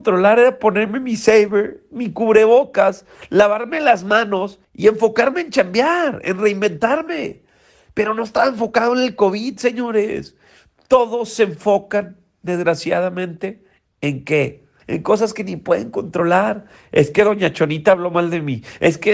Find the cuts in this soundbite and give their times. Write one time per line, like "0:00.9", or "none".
0:14.8